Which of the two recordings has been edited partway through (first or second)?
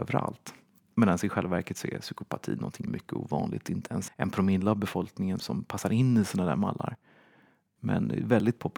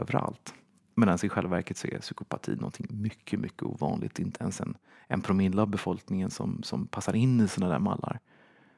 first